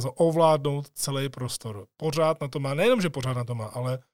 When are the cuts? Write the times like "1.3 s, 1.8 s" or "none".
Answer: none